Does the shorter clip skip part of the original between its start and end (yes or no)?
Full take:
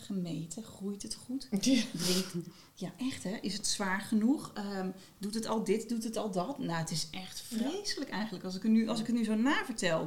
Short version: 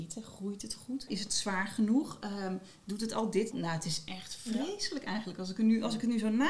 yes